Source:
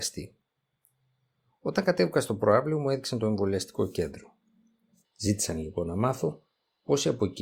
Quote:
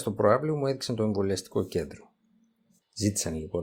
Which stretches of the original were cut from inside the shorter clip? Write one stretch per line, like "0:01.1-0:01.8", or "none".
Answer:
none